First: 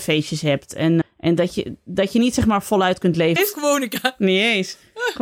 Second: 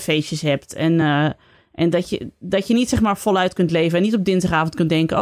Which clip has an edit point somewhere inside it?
first; 2 cuts; at 1.0 s, 3.4 s

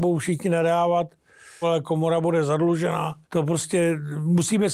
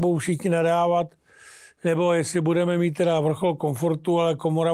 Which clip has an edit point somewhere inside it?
first; 2 cuts; at 1.6 s, 3.2 s

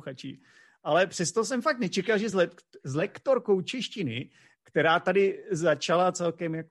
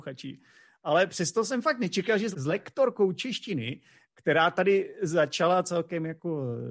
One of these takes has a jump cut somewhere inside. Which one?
second; 1 cut; at 2.3 s

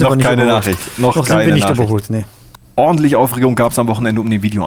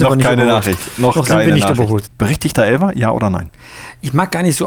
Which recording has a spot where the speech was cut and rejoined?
second; 1 cut; at 2.1 s

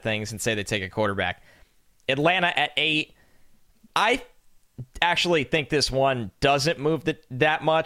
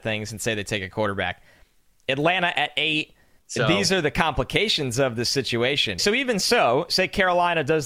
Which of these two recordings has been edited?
second; 2 cuts; at 3.4 s, 6.0 s

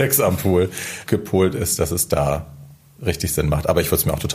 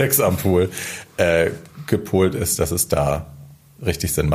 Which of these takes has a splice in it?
first; 1 cut; at 1.1 s

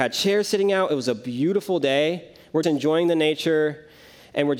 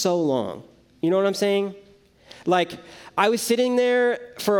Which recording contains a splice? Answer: first; 1 cut; at 2.6 s

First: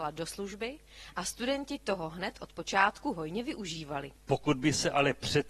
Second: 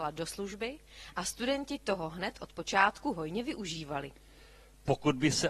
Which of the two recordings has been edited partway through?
first; 1 cut; at 4.2 s

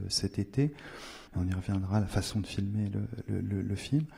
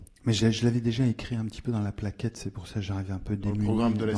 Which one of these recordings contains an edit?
first; 1 cut; at 1.3 s

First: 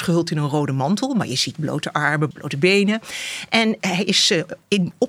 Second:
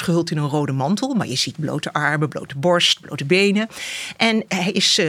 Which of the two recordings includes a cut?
first; 1 cut; at 2.3 s

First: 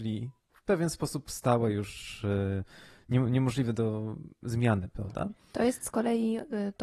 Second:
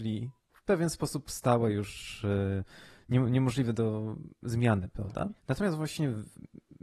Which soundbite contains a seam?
second; 1 cut; at 5.4 s

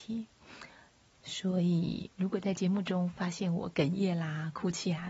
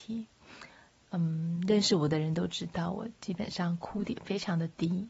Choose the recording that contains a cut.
first; 2 cuts; at 1.0 s, 2.1 s

